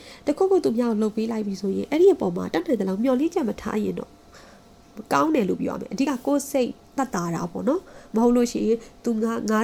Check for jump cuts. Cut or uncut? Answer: uncut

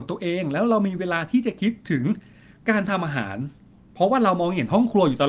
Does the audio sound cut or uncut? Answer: uncut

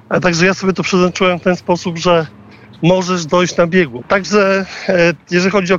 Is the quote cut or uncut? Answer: cut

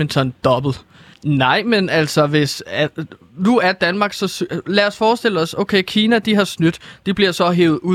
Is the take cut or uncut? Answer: cut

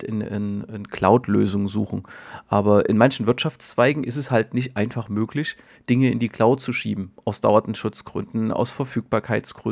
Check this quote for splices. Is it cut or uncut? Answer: uncut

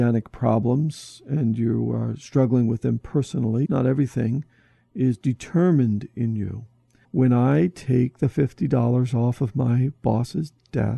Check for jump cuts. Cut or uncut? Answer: cut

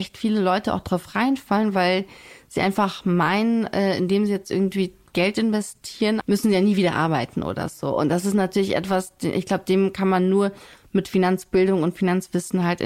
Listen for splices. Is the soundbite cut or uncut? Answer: cut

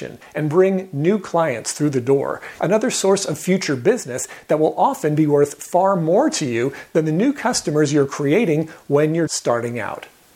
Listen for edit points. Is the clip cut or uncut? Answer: cut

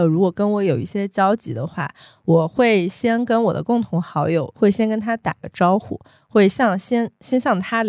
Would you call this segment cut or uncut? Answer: cut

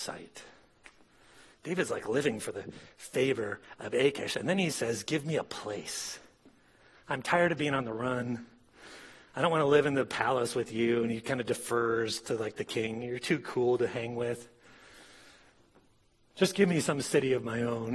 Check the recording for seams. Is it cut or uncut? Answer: uncut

